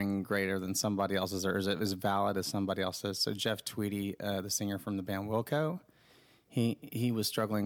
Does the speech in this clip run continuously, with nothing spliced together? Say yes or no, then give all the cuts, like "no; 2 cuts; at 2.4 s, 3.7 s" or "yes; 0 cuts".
yes; 0 cuts